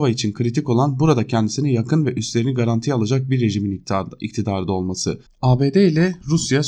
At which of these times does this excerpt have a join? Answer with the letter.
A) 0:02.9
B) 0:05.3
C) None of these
B